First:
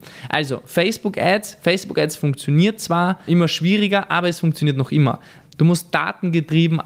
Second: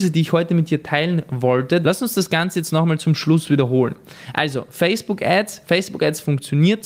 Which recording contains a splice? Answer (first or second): second